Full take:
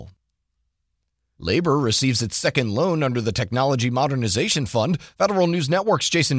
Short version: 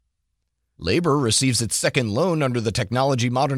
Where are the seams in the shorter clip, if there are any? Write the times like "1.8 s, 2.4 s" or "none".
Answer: none